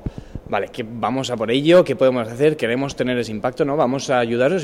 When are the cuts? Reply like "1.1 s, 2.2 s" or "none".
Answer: none